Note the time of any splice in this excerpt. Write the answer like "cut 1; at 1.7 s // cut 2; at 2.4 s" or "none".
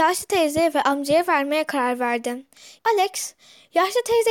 cut 1; at 2.8 s